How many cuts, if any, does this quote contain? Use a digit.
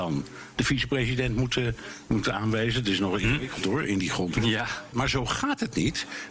1